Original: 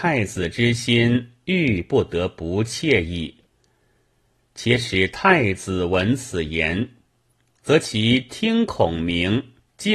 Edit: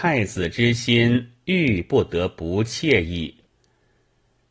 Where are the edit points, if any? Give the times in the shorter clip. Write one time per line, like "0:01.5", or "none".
none